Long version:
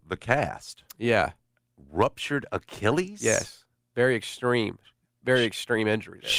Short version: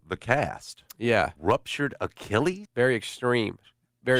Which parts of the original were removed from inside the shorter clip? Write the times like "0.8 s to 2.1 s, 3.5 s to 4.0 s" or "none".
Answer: 1.4 s to 1.9 s, 3.2 s to 3.8 s